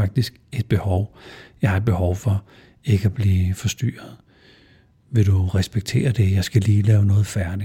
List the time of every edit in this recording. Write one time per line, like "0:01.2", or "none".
none